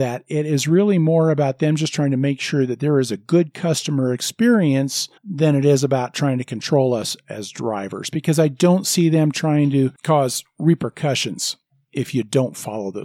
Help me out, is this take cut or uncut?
cut